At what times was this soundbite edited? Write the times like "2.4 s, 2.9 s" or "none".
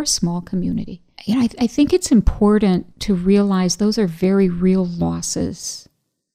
1.2 s, 2.9 s

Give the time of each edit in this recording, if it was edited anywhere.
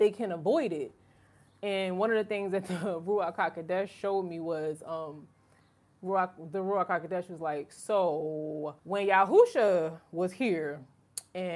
8.8 s

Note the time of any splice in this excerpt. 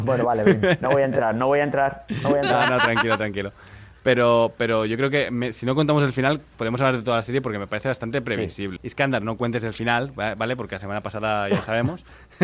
8.8 s

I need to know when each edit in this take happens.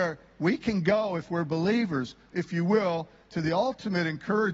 2.3 s

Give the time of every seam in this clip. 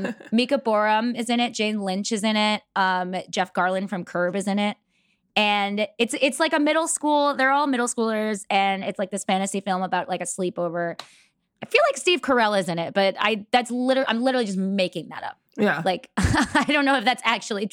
none

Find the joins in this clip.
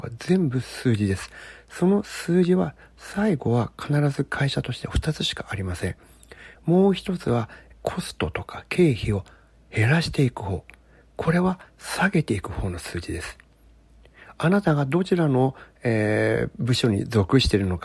6.5 s, 7.7 s

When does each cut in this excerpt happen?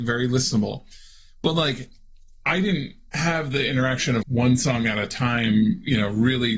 4.2 s

